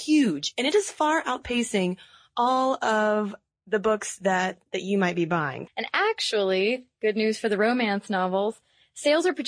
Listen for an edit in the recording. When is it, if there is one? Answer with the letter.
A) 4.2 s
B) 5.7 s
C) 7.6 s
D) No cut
B